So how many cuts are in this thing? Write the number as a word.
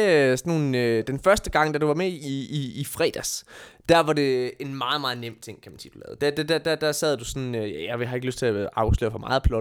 zero